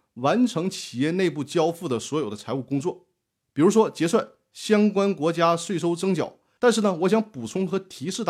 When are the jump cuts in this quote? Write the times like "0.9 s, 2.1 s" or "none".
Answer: 6.6 s